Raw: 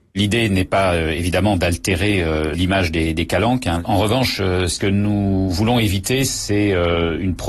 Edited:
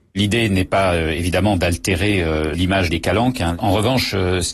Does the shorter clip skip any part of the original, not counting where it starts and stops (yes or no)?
yes